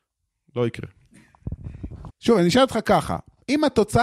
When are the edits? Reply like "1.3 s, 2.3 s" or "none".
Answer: 2.1 s